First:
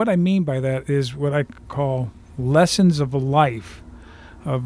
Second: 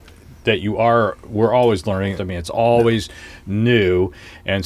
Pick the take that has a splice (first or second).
second